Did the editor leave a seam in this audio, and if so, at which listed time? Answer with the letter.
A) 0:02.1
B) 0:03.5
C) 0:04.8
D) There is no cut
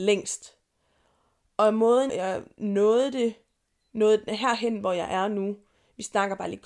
A